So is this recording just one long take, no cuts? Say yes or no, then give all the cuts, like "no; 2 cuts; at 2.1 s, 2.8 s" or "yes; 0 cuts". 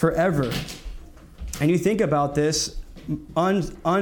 yes; 0 cuts